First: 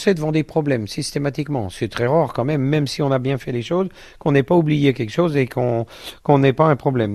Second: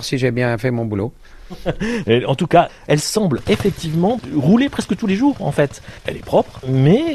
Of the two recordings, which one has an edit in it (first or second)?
second